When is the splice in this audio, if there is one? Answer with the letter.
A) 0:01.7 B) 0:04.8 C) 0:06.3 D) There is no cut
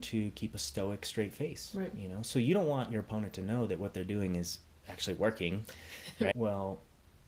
C